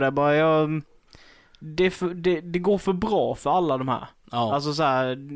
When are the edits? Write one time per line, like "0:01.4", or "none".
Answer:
none